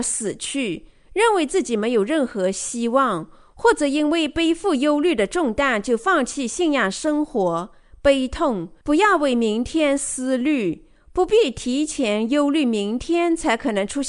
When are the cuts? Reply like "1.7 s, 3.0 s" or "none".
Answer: 8.8 s